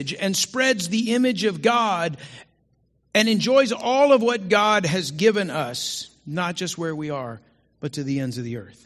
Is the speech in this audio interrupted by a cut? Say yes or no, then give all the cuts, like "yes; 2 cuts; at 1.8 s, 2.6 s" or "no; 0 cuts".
no; 0 cuts